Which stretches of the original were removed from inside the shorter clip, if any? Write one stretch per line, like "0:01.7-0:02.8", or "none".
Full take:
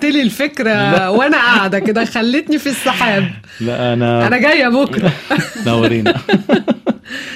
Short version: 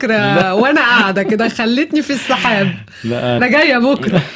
0:04.0-0:04.3